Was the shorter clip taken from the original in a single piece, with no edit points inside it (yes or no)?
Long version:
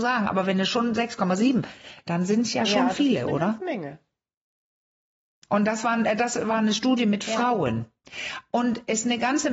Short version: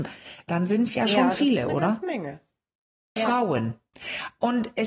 no